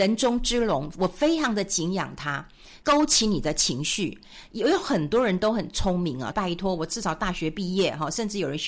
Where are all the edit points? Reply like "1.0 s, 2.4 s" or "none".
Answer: 2.8 s, 6.3 s